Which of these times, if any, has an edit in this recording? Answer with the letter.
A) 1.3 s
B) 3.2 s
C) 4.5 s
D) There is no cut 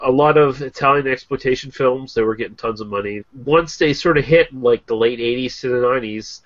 B